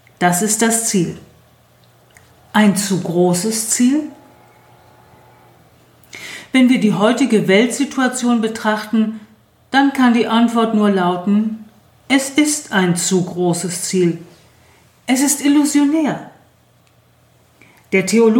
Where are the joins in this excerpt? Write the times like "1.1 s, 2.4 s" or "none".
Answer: 11.9 s